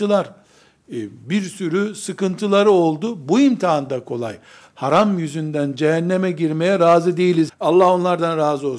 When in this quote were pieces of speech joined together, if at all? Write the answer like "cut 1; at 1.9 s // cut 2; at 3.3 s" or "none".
cut 1; at 4.7 s // cut 2; at 7.5 s

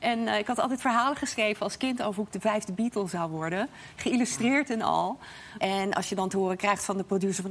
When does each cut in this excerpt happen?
cut 1; at 5.6 s

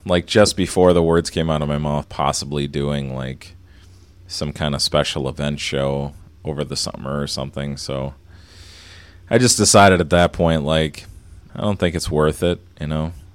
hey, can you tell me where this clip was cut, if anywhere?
cut 1; at 2.0 s // cut 2; at 11.5 s

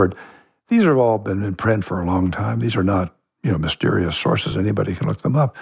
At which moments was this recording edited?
none

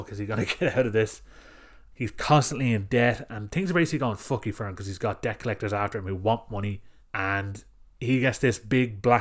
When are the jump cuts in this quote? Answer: cut 1; at 1.9 s // cut 2; at 7.0 s

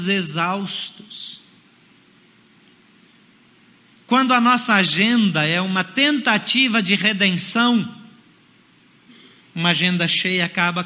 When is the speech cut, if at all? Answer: none

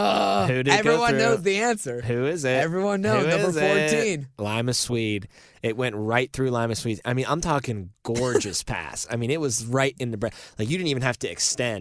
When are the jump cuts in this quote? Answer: none

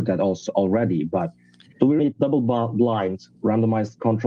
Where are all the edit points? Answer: cut 1; at 2.0 s

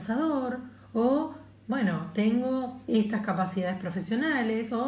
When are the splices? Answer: cut 1; at 2.9 s

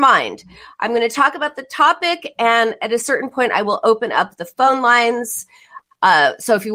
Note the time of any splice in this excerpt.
none

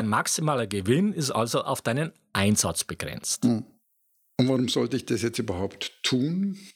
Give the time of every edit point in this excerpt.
none

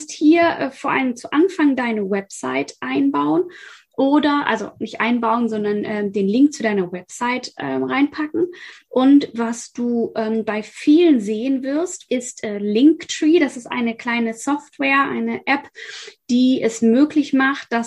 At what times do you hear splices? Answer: none

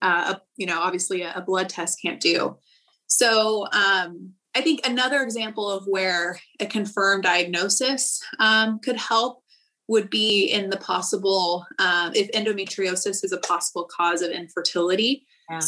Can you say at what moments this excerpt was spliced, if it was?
none

